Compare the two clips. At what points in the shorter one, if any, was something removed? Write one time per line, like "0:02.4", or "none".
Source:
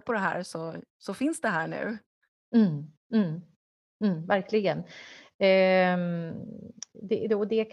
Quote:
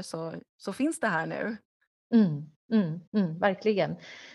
0:03.1